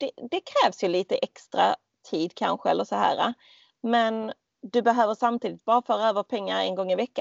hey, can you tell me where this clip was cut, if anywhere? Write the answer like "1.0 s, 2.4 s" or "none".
none